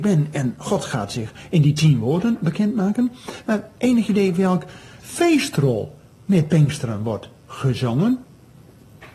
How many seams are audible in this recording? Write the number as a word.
one